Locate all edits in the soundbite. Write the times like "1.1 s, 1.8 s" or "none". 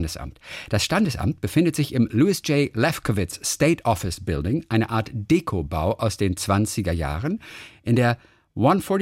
none